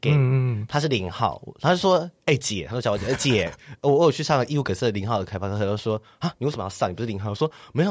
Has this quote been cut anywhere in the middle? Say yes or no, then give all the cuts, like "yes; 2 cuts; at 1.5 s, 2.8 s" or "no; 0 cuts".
no; 0 cuts